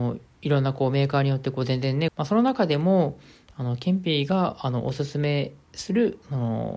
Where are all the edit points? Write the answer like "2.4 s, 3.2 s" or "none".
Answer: 2.1 s